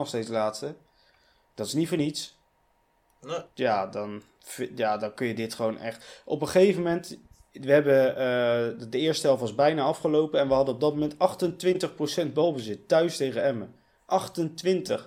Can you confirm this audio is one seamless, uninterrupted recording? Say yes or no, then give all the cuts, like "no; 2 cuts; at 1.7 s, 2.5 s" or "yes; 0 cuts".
yes; 0 cuts